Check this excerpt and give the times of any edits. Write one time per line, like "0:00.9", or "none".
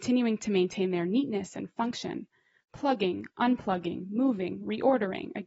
none